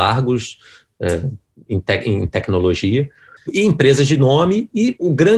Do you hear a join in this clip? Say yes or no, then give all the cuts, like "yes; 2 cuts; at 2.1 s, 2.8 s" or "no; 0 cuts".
yes; 1 cut; at 3.4 s